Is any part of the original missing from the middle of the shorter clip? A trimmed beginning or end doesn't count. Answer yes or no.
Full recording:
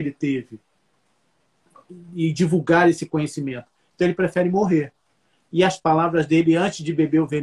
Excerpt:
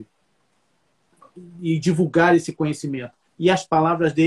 yes